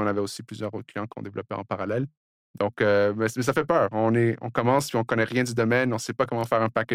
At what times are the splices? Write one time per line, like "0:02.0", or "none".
none